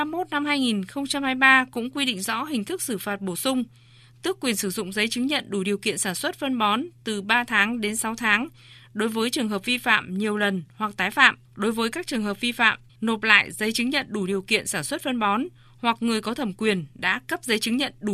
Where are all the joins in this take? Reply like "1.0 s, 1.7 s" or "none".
11.4 s, 12.9 s

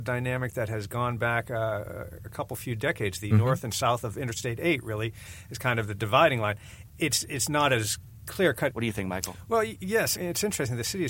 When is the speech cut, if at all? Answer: 8.7 s, 10.2 s

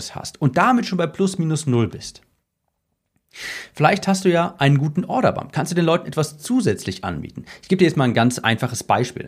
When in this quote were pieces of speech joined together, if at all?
none

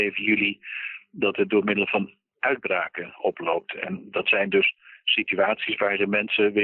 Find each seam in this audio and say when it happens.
none

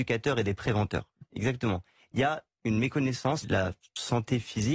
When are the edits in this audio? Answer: 1.2 s, 3.4 s

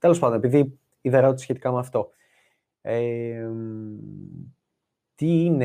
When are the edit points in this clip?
none

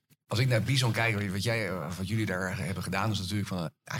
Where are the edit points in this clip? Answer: none

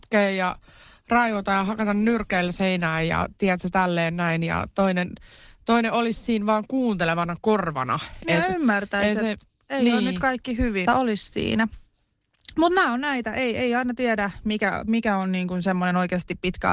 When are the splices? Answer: 10.9 s

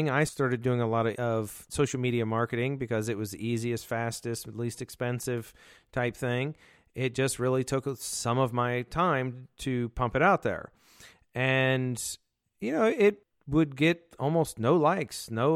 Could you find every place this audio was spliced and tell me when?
none

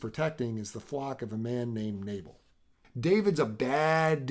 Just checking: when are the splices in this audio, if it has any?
2.8 s

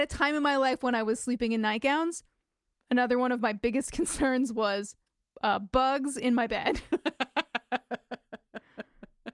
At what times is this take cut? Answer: none

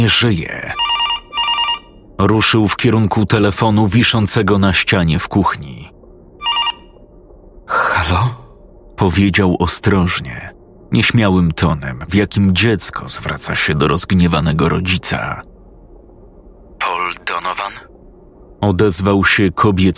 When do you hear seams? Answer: 12.1 s

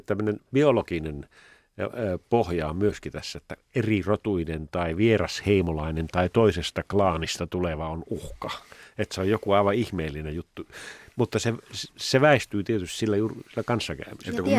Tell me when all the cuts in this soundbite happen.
none

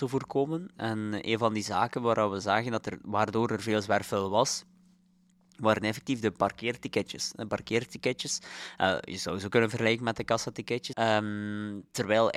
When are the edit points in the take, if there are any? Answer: 10.9 s

